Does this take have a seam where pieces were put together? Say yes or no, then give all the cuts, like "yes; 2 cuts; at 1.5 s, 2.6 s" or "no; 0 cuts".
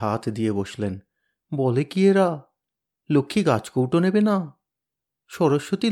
no; 0 cuts